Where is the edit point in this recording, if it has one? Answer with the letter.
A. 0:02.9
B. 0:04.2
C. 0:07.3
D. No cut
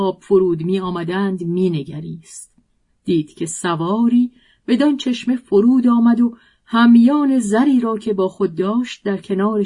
A